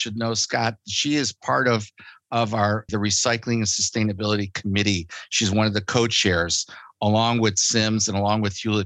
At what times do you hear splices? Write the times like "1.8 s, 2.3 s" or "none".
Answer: 2.9 s